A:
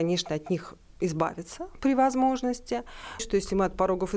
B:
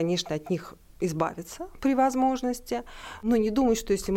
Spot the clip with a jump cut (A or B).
A